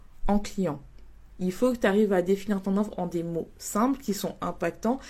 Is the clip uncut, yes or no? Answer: no